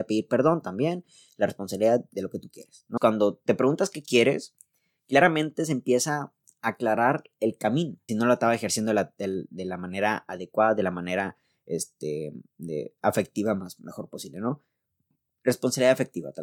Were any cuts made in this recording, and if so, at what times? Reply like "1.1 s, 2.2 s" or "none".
3.0 s, 8.1 s